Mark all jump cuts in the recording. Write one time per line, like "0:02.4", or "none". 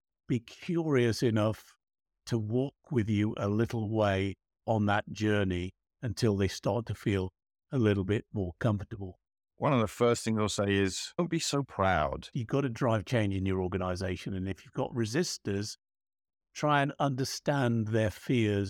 0:09.5
0:12.3